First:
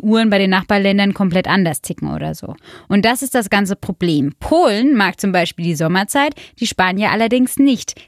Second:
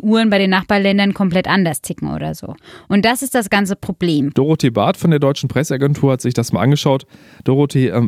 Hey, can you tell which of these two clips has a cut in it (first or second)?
second